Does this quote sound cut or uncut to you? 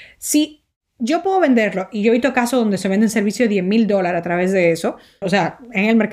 cut